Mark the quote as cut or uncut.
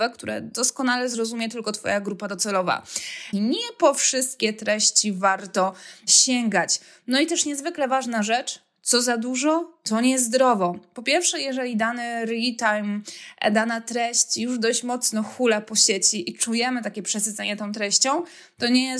cut